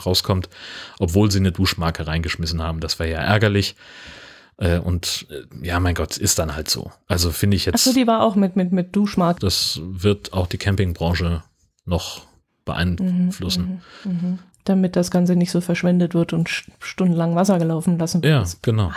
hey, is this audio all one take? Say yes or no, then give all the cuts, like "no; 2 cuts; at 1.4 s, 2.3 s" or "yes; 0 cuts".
no; 1 cut; at 9.4 s